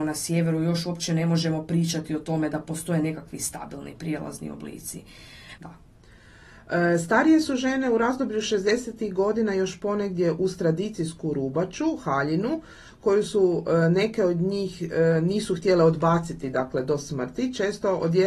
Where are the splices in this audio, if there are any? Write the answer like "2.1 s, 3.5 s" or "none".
5.6 s